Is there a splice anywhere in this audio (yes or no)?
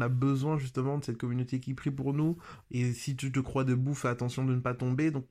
yes